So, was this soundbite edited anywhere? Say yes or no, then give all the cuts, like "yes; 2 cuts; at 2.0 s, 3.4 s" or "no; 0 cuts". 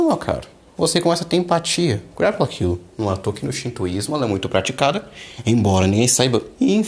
yes; 1 cut; at 2.9 s